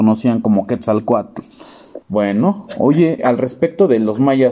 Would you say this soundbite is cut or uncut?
cut